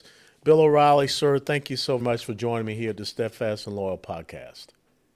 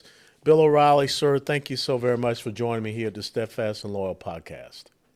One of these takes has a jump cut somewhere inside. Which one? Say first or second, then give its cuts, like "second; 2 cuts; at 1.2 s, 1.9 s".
first; 1 cut; at 2.0 s